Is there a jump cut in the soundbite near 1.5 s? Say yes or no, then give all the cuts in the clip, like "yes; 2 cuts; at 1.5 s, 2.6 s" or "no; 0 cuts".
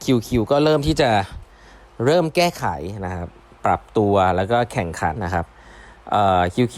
no; 1 cut; at 5.2 s